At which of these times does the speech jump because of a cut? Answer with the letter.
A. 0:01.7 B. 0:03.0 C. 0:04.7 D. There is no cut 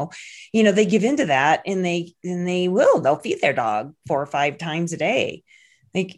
D